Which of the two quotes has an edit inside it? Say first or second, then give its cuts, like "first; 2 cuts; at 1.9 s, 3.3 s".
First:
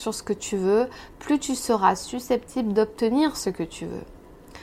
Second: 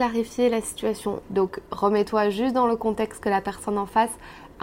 second; 1 cut; at 1.2 s